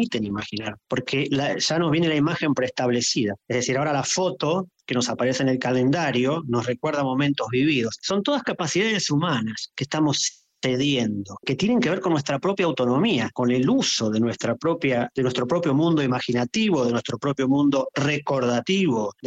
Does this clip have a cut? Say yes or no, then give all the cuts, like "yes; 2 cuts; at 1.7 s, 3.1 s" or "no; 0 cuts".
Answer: yes; 1 cut; at 3.4 s